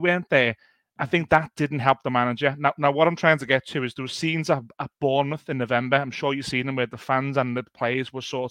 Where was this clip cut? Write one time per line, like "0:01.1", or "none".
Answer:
none